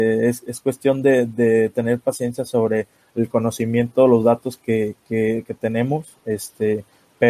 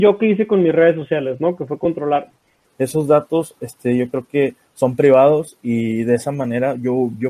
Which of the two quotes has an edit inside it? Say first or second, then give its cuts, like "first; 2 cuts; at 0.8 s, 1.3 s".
second; 1 cut; at 2.6 s